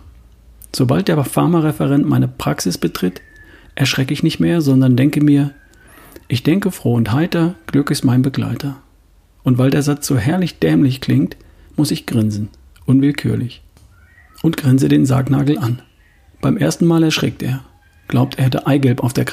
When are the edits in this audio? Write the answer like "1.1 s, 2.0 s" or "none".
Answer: none